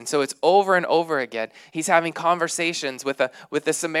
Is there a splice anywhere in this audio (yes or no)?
yes